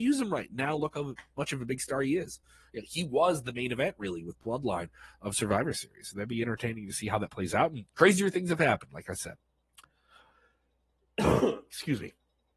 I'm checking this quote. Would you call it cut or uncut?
uncut